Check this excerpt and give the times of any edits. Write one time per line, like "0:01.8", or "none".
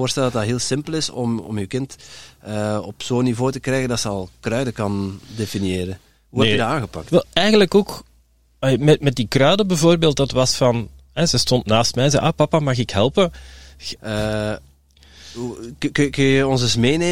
0:14.0

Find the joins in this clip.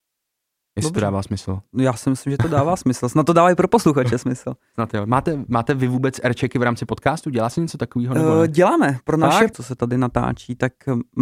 0:09.5

